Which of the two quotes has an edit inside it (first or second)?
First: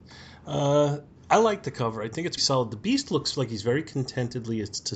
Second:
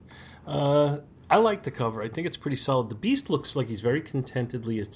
first